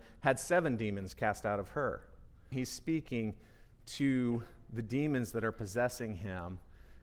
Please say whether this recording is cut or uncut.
cut